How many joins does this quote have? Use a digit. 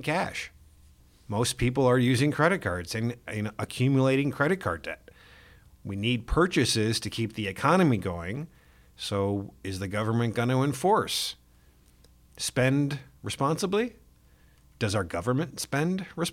0